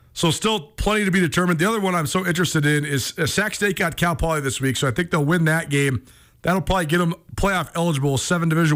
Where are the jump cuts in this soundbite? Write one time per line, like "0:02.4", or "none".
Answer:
none

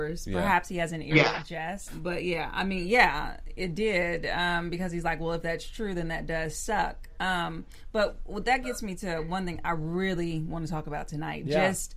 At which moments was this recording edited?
0:01.9

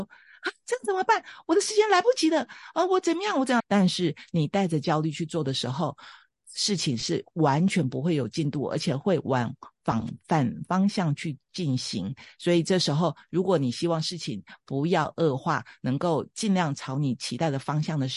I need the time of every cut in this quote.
0:03.6

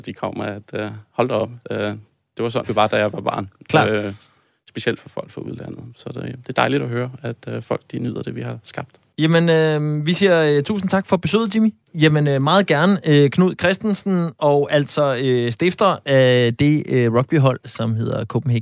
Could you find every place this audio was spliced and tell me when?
0:02.6
0:09.1
0:11.9

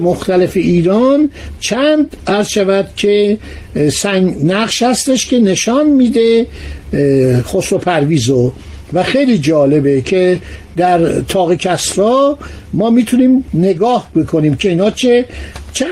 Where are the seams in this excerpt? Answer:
none

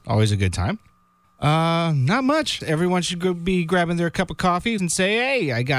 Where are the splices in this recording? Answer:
0:01.2
0:02.6
0:04.8

